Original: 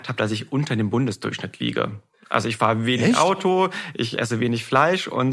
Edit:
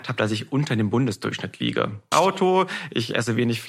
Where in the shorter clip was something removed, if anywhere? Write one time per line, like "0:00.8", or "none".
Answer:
0:02.1